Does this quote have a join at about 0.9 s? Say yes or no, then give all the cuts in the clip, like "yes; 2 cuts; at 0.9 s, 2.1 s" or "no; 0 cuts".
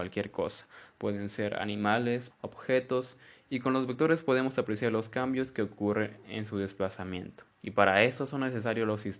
no; 2 cuts; at 2.3 s, 7.5 s